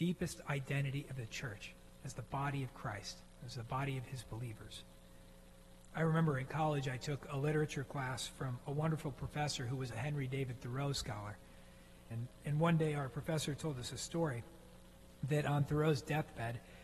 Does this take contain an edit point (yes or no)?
yes